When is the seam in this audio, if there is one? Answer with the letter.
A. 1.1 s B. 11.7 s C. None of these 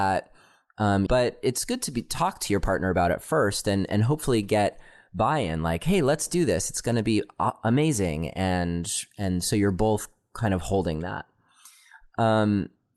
A